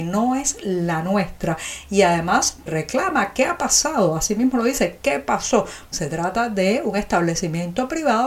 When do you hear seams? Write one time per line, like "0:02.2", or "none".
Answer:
0:02.7
0:05.9